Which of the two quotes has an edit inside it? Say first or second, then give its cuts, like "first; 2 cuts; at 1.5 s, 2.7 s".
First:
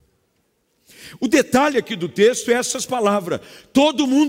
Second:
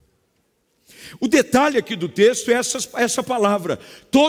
first; 1 cut; at 2.9 s